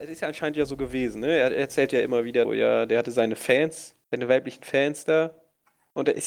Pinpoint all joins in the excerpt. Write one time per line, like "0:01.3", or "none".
0:02.4
0:04.0